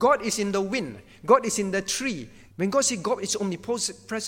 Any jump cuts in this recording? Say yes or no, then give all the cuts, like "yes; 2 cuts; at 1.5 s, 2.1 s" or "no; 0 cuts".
yes; 1 cut; at 2.5 s